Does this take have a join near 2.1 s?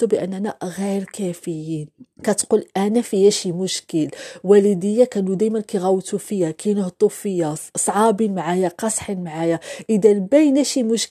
yes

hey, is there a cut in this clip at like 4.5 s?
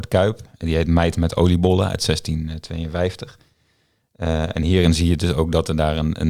no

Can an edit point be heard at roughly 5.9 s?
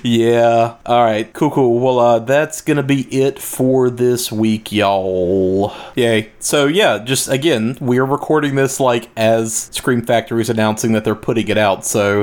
yes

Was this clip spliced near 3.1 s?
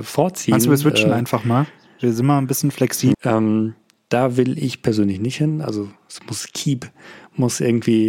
yes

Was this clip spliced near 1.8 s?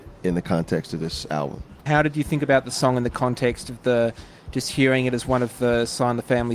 yes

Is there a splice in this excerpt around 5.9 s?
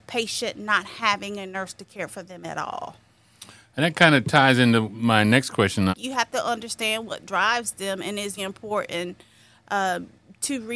yes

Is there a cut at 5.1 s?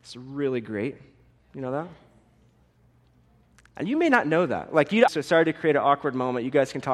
yes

